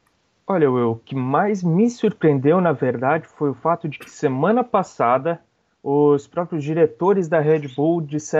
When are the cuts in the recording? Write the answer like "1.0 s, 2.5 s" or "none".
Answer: none